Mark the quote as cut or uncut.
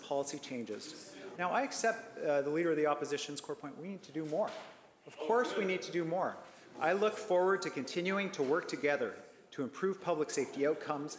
cut